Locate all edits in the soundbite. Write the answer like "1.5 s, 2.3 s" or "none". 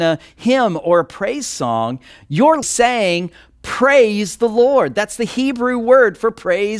2.6 s